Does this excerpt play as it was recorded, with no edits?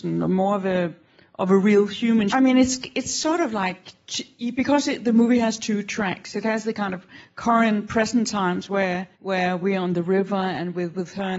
no; 2 cuts; at 2.3 s, 9.1 s

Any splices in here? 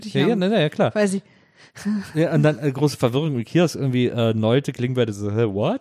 no; 0 cuts

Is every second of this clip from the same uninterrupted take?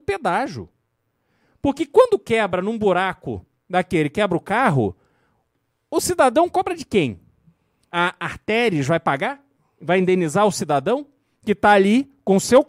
yes; 0 cuts

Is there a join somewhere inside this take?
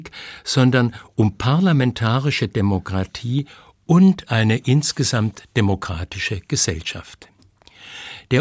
no; 0 cuts

